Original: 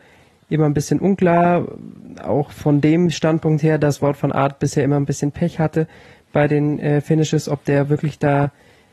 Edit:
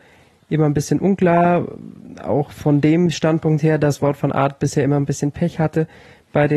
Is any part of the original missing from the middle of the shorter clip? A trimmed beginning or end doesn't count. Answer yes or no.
no